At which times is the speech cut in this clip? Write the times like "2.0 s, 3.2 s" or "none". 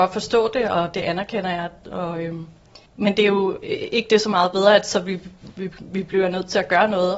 2.9 s